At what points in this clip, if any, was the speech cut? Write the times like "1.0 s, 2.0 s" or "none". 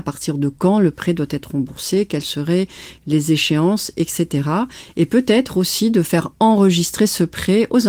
none